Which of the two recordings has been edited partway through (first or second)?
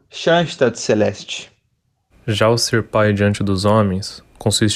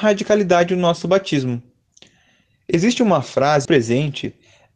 second